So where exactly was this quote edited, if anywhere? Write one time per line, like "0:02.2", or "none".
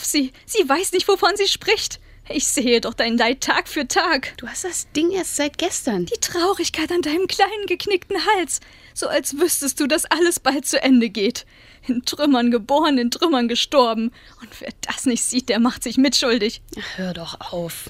none